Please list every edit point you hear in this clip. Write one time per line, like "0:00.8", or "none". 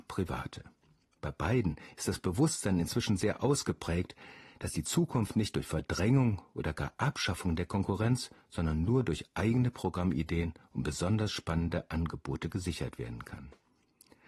none